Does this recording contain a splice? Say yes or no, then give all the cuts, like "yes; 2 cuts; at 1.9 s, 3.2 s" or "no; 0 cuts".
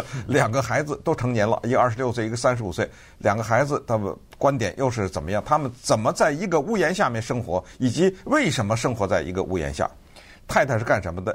yes; 1 cut; at 10.4 s